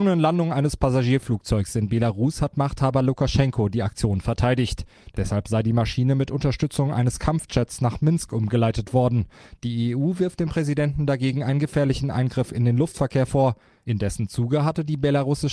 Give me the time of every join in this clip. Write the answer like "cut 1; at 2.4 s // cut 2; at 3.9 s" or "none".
cut 1; at 5.1 s

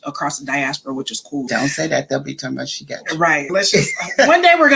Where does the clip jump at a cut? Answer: cut 1; at 1.5 s // cut 2; at 3.5 s

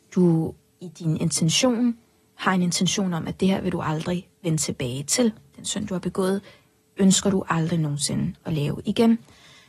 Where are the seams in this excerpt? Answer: none

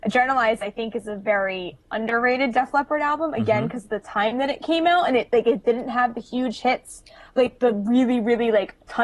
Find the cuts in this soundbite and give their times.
none

